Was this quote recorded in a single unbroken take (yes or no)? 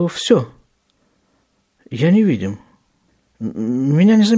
yes